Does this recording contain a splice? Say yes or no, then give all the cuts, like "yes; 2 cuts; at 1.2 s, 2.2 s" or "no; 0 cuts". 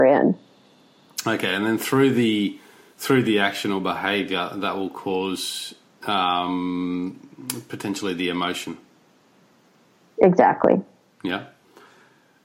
no; 0 cuts